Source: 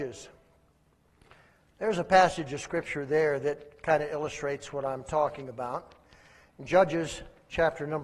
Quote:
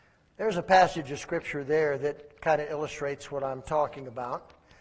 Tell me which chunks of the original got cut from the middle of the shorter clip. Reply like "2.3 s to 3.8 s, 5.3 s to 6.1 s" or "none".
none